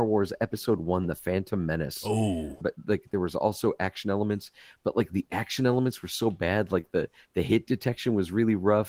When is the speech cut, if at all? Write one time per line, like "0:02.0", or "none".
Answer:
0:02.6

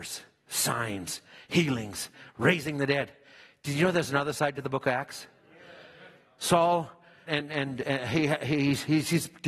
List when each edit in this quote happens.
0:07.3

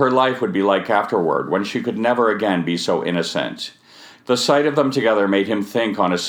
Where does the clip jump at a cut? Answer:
0:04.2

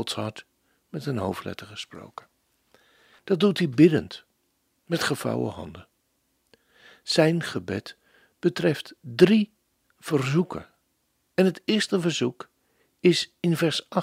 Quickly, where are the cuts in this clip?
0:03.2

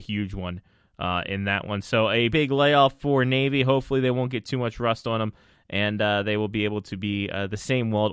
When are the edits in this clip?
0:02.3

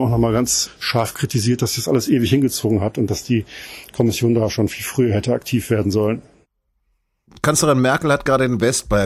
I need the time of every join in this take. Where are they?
none

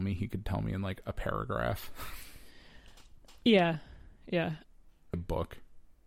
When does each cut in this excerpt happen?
0:05.1

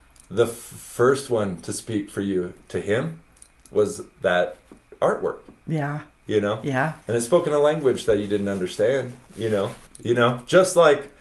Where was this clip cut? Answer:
0:07.0
0:09.9

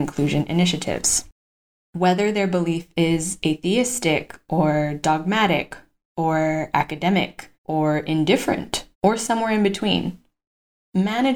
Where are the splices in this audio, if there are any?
0:01.8
0:07.5
0:08.9

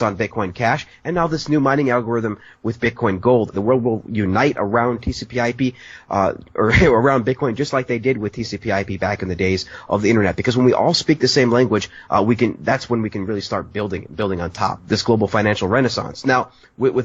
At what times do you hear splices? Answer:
0:03.5
0:14.8

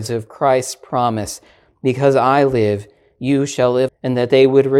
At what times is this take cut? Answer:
0:03.9

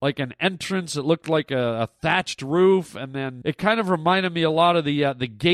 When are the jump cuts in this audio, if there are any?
0:03.4

